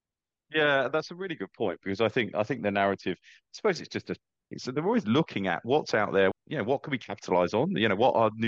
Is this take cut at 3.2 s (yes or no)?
no